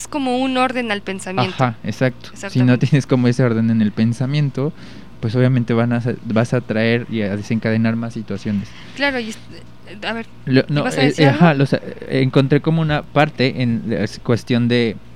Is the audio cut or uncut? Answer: uncut